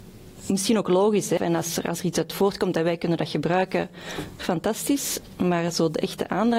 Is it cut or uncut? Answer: cut